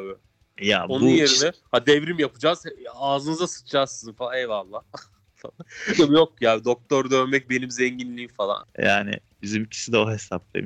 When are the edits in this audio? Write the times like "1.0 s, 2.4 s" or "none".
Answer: 8.6 s